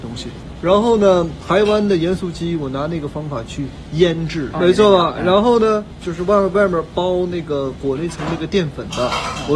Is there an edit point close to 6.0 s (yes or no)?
yes